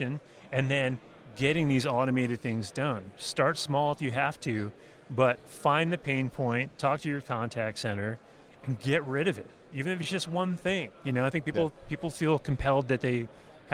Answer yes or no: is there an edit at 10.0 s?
no